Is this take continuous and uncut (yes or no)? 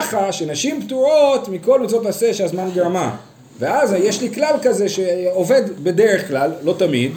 yes